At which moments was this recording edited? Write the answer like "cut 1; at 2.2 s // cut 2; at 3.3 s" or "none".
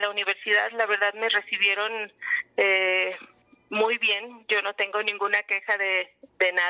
none

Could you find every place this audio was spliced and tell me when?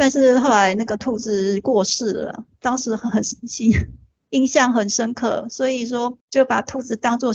cut 1; at 6.2 s

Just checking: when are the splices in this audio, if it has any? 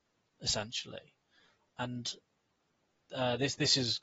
none

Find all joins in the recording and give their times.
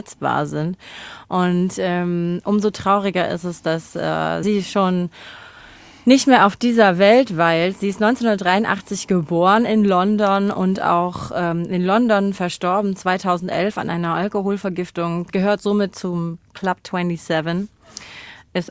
none

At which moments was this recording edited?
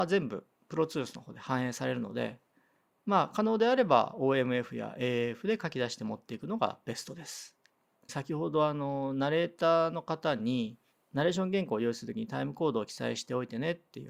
cut 1; at 8.1 s

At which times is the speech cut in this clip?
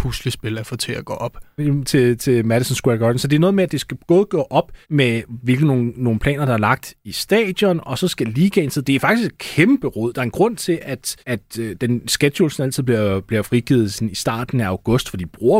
cut 1; at 1.6 s // cut 2; at 4.8 s // cut 3; at 11.2 s

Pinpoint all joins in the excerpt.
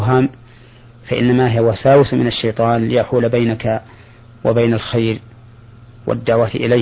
none

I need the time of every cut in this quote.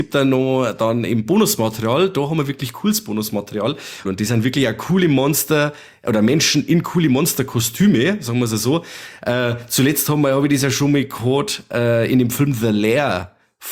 cut 1; at 4.0 s

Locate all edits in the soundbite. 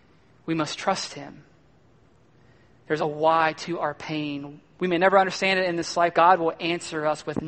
cut 1; at 3.0 s // cut 2; at 6.1 s

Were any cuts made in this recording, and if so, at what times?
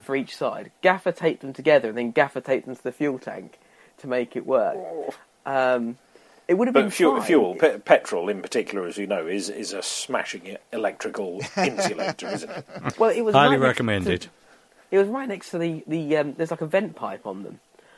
cut 1; at 12.9 s

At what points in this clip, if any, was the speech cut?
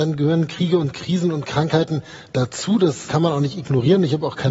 cut 1; at 3.1 s

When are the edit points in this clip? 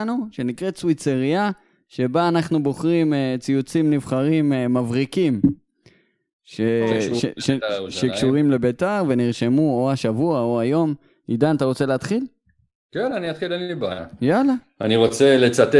none

